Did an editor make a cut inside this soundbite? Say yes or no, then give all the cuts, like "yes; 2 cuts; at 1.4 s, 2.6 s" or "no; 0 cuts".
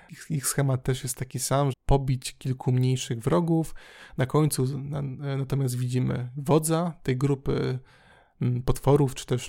yes; 1 cut; at 1.7 s